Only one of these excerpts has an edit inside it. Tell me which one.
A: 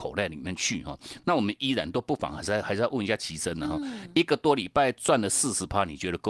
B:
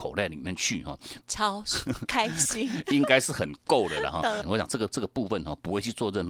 B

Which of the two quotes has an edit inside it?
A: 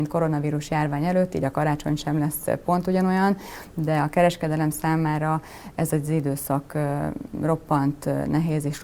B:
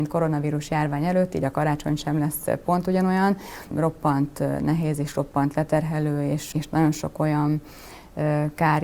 B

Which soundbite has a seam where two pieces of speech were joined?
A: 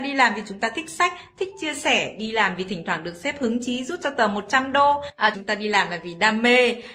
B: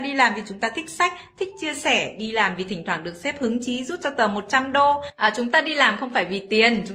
A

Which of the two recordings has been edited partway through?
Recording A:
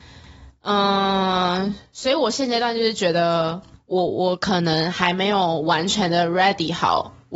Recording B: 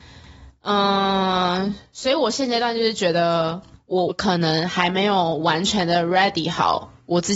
B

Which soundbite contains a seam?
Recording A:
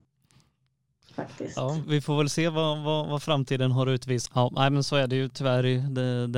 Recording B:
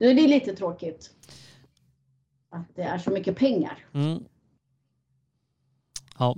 A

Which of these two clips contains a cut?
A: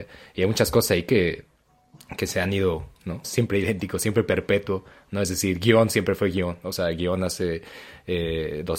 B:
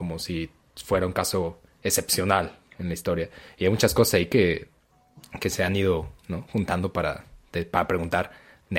A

